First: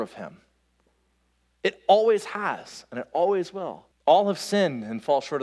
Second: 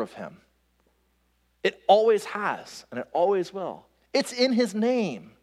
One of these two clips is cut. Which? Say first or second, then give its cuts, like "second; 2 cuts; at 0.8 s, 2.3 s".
first; 1 cut; at 3.9 s